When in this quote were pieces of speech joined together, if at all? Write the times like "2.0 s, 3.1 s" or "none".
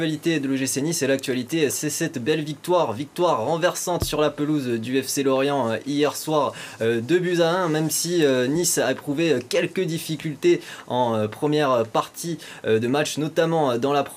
none